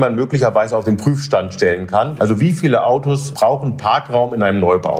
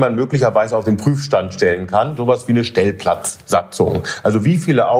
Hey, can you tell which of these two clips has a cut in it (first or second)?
first